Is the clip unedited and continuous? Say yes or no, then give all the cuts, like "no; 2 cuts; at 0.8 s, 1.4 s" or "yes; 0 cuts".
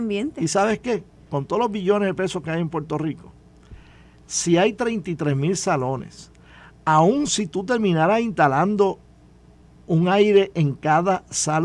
yes; 0 cuts